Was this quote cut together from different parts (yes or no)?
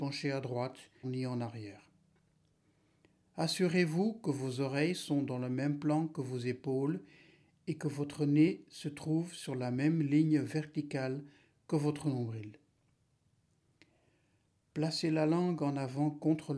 yes